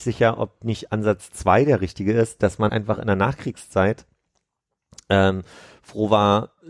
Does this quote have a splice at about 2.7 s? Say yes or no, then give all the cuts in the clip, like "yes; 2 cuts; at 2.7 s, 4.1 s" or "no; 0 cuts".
yes; 1 cut; at 2.7 s